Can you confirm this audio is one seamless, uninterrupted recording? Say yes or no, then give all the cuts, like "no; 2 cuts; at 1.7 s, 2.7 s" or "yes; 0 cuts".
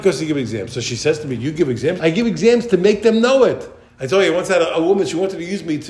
no; 2 cuts; at 2.0 s, 3.9 s